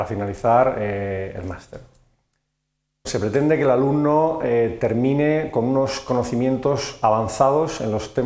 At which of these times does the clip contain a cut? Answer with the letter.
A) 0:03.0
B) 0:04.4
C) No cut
A